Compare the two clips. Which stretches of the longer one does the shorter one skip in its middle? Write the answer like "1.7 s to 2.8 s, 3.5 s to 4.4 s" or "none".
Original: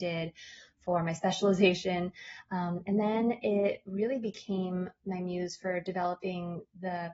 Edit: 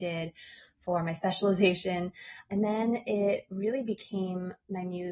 2.5 s to 2.8 s